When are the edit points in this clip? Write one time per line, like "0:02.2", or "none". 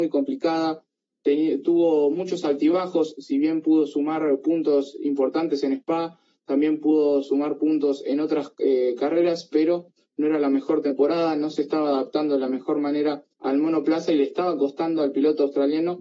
0:13.3